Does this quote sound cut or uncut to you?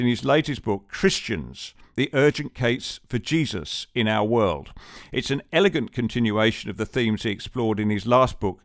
uncut